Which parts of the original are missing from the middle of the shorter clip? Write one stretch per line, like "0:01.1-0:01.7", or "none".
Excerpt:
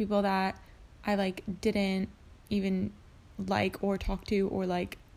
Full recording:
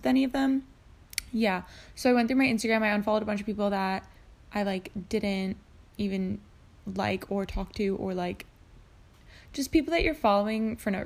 none

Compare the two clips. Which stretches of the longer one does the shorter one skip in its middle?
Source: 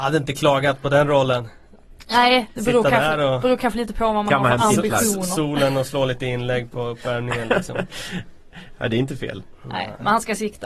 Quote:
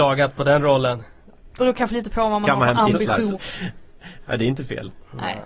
0:02.0-0:03.4
0:05.2-0:07.9

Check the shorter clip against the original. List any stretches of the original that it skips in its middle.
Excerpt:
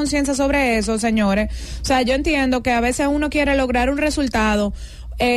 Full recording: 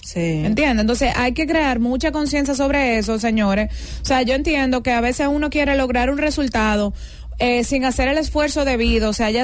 none

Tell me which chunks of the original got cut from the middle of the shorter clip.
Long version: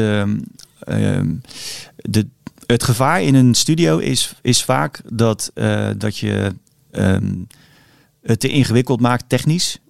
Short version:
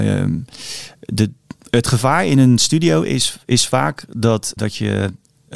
0:05.5-0:06.0

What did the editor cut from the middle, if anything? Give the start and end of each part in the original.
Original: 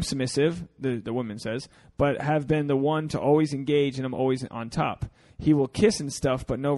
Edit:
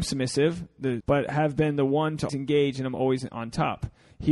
0:01.0-0:01.9
0:03.2-0:03.5

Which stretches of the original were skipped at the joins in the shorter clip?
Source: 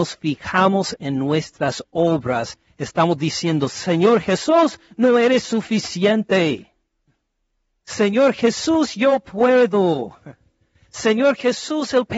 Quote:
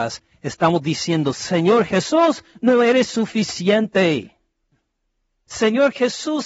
0:07.8-0:10.9

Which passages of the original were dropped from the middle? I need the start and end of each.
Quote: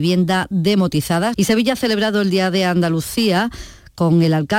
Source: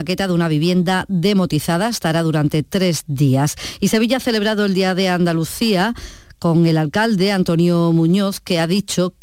0:01.9-0:03.8

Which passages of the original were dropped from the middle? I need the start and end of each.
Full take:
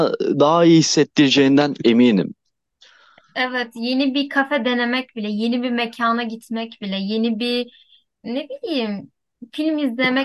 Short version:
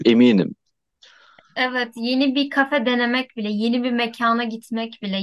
none

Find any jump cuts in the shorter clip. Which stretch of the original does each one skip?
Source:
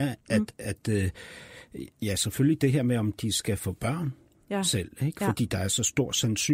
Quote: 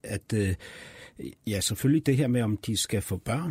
none

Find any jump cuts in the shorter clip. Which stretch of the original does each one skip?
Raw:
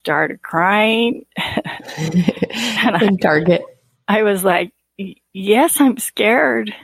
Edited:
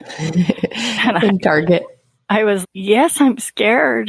0:04.4-0:05.2

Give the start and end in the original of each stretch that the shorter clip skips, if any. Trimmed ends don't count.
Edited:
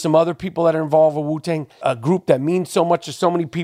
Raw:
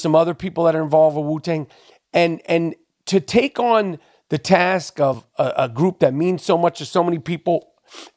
0:01.8-0:05.5

